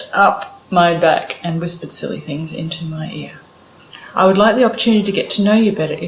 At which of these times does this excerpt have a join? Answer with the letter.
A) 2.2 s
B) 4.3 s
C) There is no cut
C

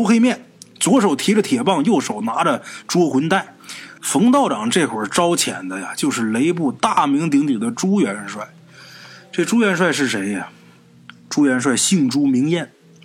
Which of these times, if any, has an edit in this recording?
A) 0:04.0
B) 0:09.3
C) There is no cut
A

